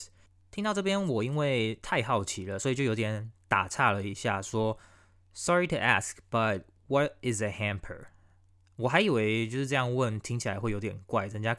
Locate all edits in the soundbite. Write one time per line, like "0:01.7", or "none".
none